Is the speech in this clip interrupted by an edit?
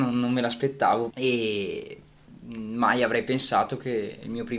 yes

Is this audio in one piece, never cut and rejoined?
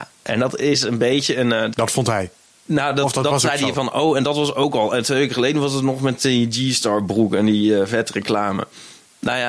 no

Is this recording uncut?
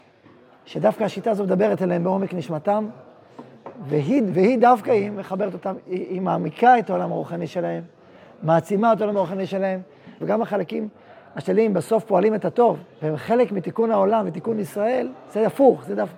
no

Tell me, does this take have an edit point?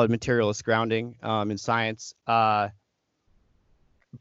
no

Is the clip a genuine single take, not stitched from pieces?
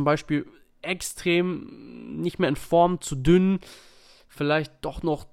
yes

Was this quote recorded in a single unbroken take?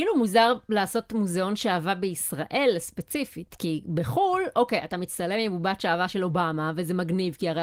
yes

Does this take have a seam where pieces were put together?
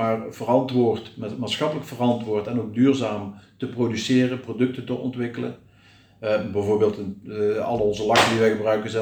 no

